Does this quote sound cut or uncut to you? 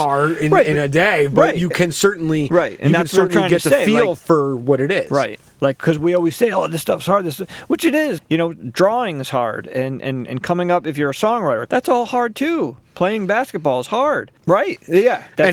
cut